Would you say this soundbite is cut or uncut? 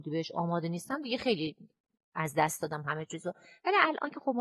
uncut